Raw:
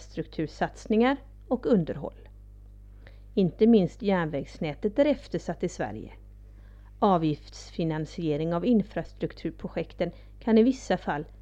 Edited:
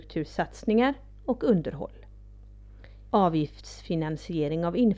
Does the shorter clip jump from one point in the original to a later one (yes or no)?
yes